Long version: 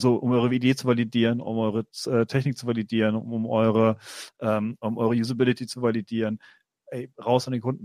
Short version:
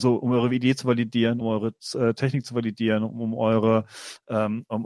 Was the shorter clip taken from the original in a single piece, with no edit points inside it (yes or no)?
no